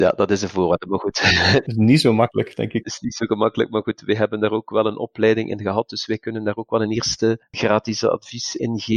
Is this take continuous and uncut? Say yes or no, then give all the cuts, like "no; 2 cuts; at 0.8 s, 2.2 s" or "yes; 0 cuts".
yes; 0 cuts